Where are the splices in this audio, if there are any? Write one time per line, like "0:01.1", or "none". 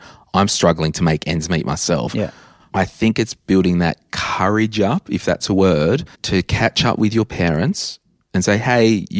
0:06.1